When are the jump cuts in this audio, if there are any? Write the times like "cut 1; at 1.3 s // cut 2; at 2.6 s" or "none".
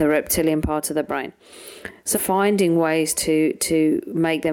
cut 1; at 2.1 s

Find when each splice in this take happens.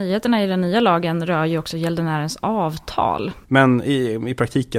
cut 1; at 3.4 s

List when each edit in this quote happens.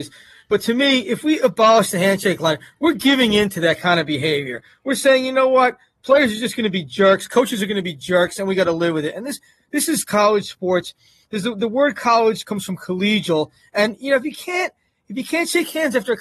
none

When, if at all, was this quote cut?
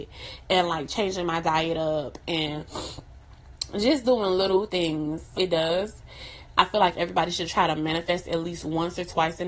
cut 1; at 5.3 s

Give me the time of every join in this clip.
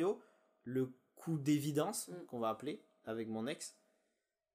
none

